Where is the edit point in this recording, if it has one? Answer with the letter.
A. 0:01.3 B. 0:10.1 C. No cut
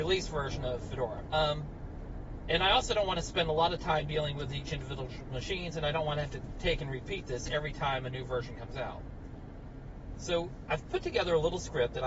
A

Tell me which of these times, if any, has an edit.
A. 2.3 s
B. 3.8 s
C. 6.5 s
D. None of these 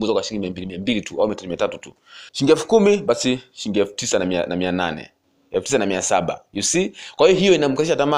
A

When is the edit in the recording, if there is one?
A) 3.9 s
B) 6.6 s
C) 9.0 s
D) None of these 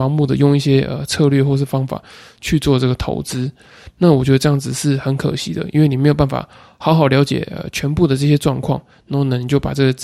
D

